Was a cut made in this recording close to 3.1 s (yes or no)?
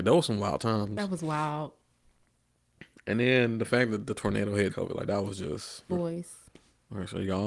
no